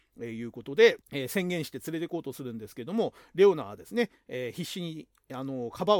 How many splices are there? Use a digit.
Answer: 1